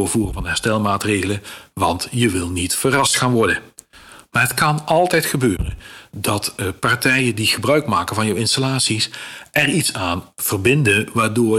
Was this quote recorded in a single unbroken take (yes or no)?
yes